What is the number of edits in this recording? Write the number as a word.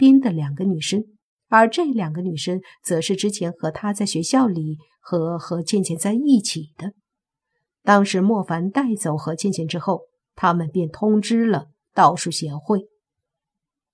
zero